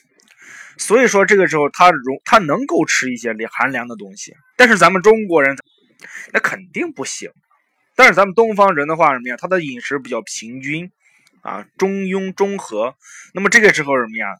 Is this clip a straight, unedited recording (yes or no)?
no